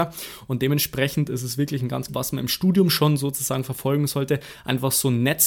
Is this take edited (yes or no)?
yes